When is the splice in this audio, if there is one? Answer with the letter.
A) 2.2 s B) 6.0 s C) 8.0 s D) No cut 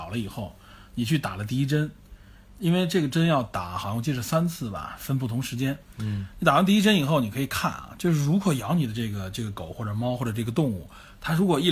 D